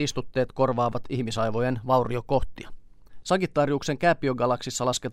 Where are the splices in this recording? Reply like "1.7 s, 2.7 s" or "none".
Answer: 3.2 s